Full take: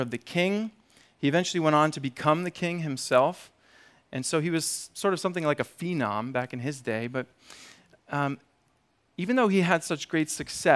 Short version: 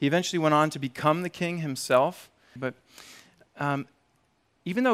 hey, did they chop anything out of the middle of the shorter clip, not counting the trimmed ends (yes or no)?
yes